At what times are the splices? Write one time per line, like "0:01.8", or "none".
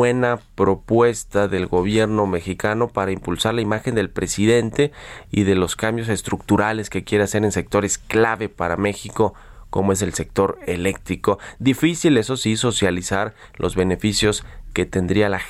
none